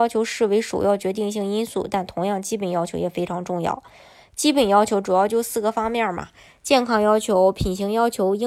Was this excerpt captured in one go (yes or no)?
yes